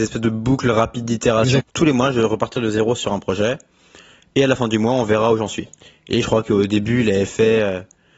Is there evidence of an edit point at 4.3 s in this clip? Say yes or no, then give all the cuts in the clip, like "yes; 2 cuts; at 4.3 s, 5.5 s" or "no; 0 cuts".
no; 1 cut; at 1.6 s